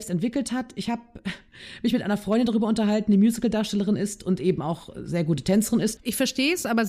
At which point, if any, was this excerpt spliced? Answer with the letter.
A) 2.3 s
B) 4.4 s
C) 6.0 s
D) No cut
C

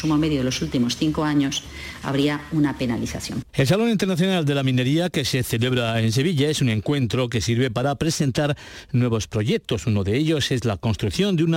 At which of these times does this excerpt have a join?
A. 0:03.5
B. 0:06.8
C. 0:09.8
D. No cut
A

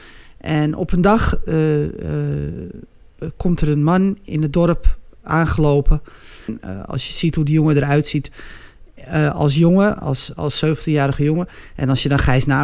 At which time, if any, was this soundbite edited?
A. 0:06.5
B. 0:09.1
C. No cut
A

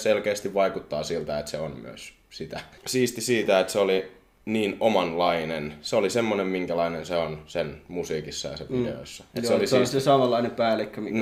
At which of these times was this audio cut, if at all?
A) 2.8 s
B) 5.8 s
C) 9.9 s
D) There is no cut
A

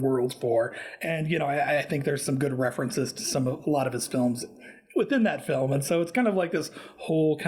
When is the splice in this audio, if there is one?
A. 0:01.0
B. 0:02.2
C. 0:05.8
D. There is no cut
D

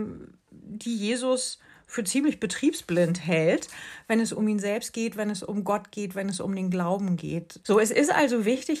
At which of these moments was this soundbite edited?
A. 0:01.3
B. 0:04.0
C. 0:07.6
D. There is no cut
C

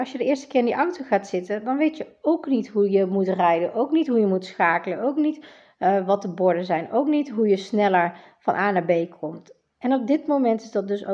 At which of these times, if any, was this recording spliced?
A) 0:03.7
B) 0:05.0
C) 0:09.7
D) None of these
D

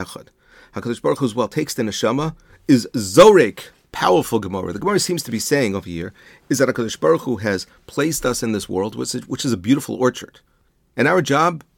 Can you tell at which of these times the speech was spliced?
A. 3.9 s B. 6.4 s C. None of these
A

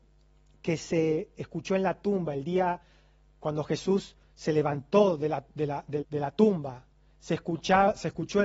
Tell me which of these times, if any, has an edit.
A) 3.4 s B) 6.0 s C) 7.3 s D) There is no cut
B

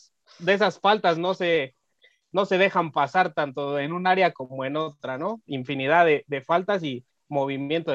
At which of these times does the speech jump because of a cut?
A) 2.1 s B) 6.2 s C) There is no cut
C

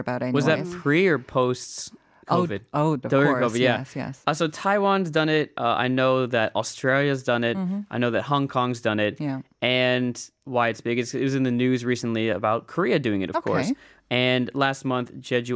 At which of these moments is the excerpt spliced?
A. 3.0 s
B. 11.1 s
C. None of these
A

